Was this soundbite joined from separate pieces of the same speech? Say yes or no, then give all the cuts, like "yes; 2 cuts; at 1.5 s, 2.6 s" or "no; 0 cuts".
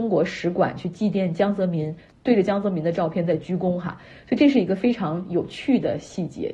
no; 0 cuts